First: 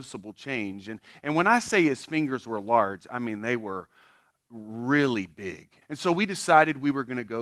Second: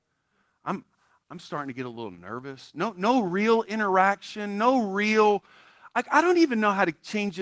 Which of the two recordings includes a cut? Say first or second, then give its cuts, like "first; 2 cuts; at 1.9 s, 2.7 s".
first; 1 cut; at 5.8 s